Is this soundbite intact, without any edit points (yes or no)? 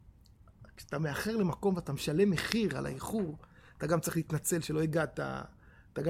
yes